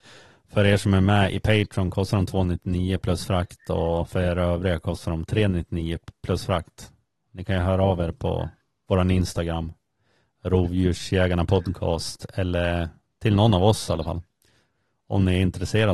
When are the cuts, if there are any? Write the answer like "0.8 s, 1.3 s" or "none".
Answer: none

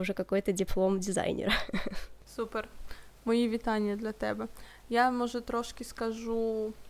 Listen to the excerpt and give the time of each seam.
2.2 s

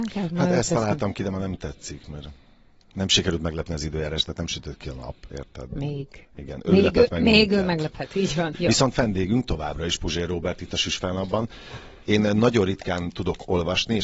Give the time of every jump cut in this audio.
8.5 s, 12.0 s

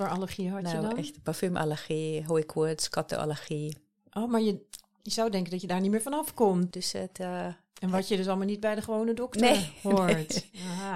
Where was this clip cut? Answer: 6.7 s

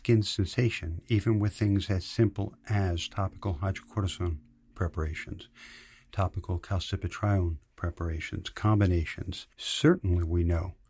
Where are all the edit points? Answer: none

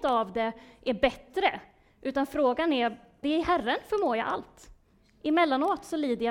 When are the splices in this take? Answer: 3.2 s

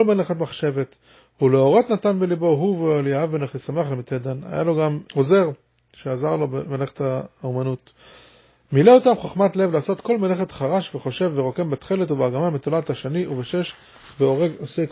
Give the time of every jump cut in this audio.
5.1 s

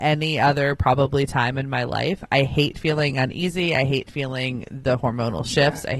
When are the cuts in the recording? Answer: none

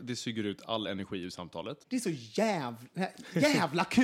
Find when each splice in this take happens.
1.8 s

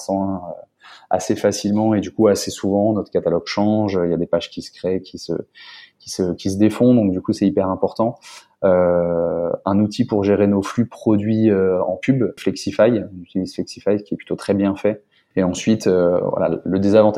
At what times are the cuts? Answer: 12.4 s, 15.3 s

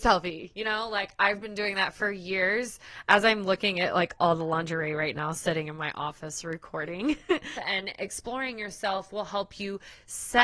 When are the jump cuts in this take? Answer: 7.6 s

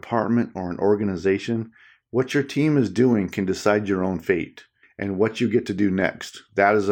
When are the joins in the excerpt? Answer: 4.8 s

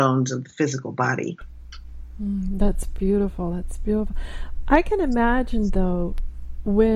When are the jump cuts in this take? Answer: none

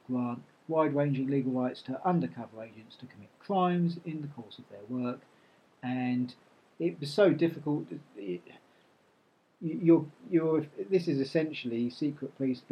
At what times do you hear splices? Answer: none

